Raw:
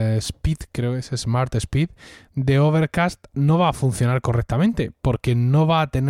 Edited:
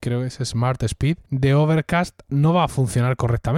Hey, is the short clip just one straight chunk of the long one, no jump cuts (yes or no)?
no